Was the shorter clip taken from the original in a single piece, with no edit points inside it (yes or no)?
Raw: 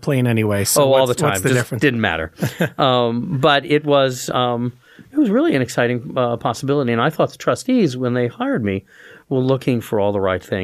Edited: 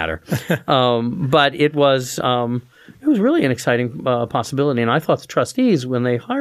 yes